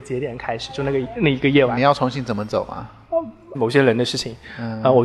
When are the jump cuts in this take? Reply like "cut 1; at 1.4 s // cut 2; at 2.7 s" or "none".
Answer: cut 1; at 1.2 s // cut 2; at 3.5 s